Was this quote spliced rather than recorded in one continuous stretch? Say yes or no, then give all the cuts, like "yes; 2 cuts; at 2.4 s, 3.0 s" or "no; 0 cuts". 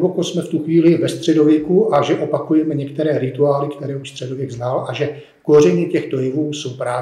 no; 0 cuts